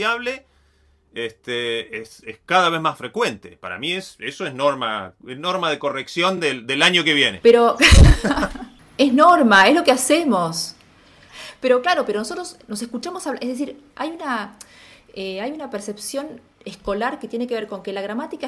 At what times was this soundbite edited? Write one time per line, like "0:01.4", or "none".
none